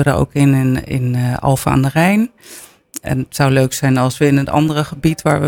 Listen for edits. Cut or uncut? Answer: uncut